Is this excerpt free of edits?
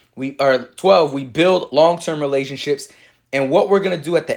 yes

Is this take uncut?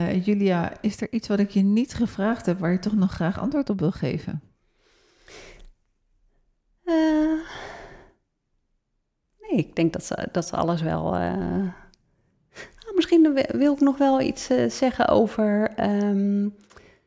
yes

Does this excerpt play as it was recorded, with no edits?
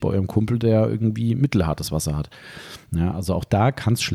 yes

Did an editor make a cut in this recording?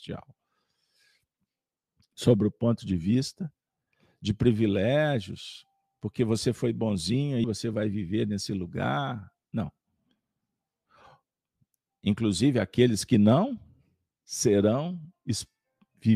yes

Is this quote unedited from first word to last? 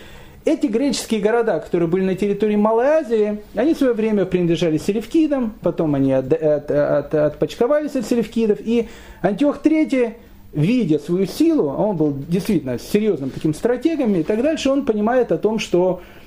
yes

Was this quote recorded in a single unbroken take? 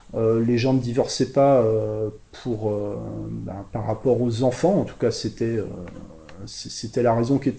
yes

